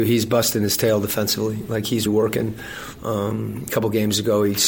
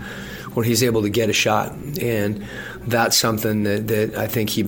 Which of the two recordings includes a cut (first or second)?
first